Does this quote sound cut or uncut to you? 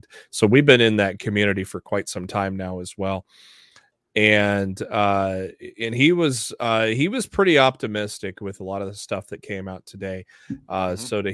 uncut